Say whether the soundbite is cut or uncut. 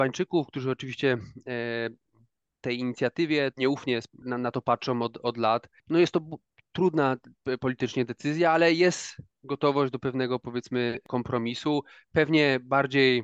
cut